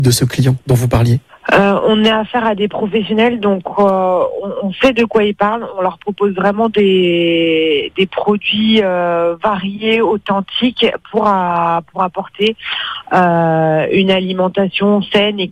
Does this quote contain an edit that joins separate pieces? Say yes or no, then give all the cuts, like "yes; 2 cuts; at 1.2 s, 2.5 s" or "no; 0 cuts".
no; 0 cuts